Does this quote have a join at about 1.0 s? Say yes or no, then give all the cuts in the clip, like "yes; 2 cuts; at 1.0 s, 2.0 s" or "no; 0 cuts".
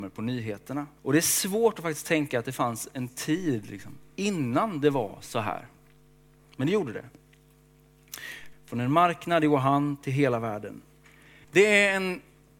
yes; 3 cuts; at 1.0 s, 8.5 s, 11.4 s